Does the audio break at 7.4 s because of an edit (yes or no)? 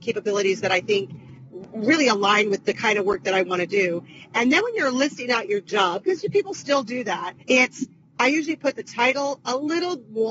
yes